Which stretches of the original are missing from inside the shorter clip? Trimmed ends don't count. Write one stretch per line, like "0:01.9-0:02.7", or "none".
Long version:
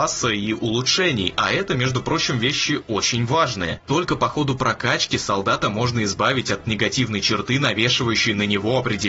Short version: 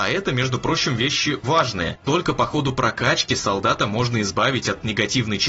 0:02.9-0:03.3